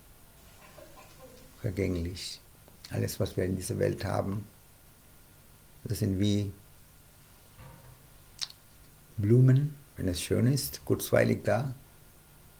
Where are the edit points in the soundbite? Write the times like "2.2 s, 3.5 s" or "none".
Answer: 9.9 s